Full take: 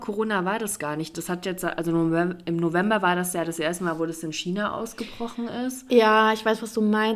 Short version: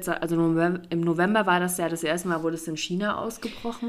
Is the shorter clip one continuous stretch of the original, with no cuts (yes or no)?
yes